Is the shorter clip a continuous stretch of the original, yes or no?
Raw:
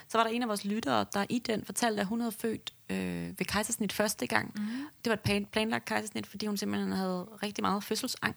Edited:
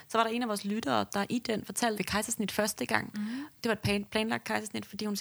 no